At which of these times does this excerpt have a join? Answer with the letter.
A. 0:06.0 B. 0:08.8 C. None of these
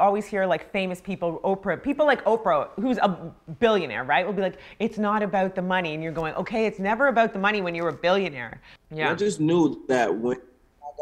B